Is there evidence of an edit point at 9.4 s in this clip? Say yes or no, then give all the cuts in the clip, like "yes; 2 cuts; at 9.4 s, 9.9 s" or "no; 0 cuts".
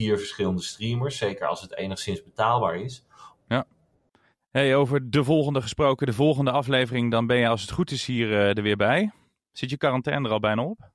no; 1 cut; at 3.4 s